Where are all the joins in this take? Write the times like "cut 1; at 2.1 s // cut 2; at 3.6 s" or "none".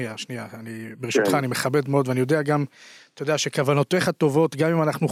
none